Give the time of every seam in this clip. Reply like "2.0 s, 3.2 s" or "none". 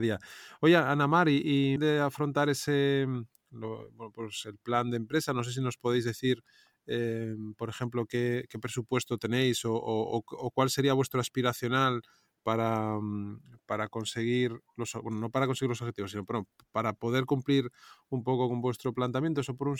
1.8 s